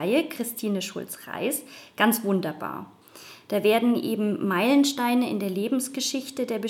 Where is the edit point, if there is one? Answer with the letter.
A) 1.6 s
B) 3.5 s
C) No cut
C